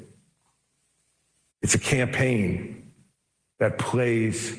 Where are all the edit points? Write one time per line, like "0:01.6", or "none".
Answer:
none